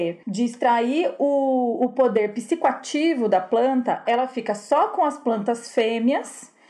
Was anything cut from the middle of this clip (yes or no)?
yes